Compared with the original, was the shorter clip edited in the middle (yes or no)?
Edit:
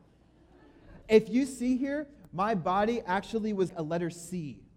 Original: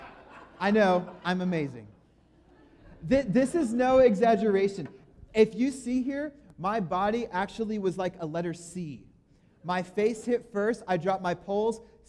yes